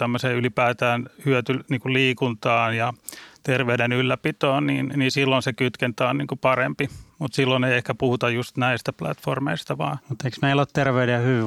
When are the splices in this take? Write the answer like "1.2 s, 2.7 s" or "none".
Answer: none